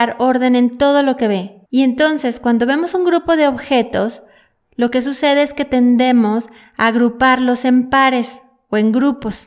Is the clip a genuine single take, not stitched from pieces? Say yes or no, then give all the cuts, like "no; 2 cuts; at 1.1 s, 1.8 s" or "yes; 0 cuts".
no; 1 cut; at 1.7 s